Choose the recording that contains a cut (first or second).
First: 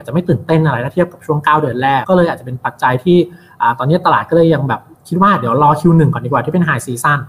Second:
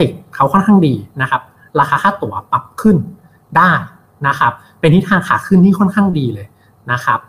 first